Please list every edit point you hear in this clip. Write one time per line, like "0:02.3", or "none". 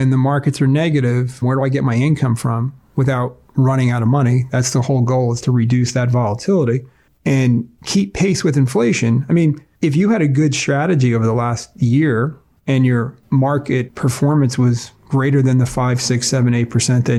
0:01.4